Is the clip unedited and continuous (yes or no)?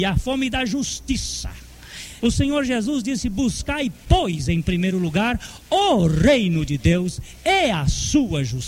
no